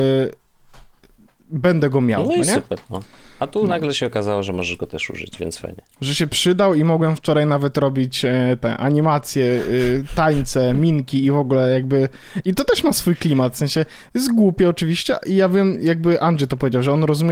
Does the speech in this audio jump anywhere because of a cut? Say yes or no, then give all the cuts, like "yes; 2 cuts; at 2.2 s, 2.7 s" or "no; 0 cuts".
no; 0 cuts